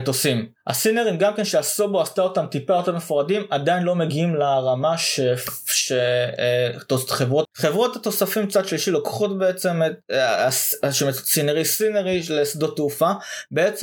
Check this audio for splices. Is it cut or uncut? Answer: cut